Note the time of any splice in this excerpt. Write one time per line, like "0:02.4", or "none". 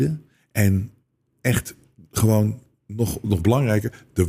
none